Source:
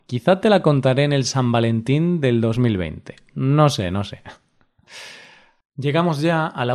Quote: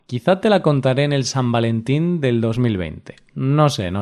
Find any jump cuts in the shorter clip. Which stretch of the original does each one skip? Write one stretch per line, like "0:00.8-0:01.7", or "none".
none